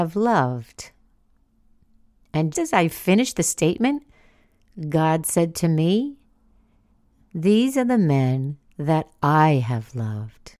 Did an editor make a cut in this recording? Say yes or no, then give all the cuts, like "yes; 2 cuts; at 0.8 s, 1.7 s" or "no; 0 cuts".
yes; 1 cut; at 2.5 s